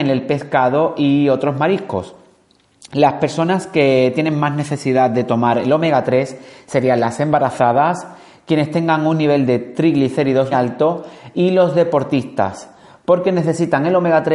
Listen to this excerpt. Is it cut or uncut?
cut